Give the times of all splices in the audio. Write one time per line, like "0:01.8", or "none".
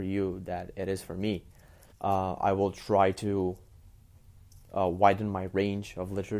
0:01.9